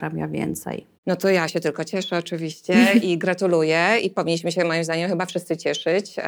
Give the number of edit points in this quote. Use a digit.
1